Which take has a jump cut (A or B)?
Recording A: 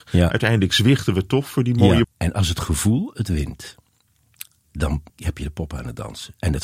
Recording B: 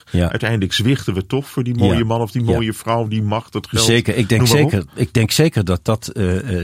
A